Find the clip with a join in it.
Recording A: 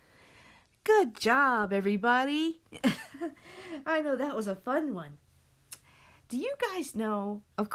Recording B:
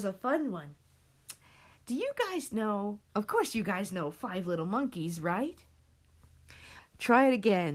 B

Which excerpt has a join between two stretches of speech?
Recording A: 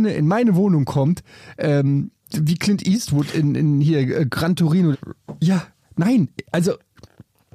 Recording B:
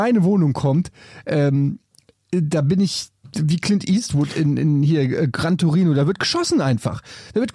A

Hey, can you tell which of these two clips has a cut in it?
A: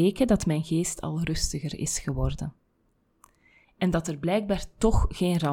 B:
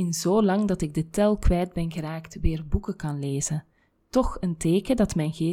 A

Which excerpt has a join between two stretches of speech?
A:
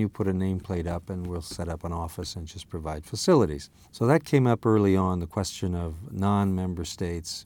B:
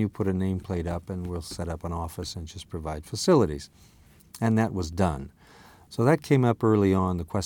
A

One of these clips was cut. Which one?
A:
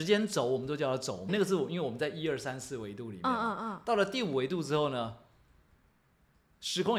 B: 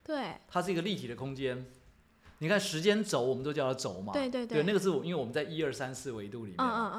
A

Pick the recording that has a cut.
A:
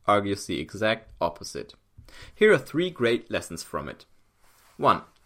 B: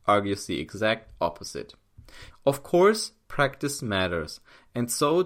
B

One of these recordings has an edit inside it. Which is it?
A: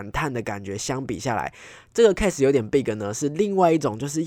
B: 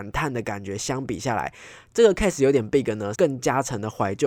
B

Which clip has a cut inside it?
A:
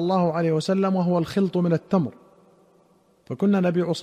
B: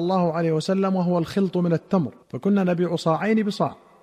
B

